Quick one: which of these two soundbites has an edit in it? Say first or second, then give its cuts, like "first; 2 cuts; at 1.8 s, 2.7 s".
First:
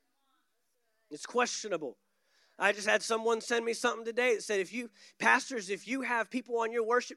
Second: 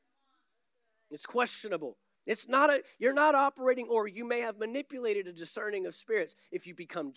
second; 1 cut; at 2.2 s